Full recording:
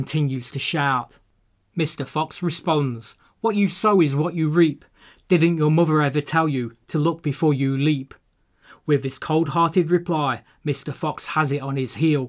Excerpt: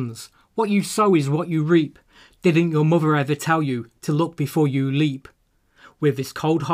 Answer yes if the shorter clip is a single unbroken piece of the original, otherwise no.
yes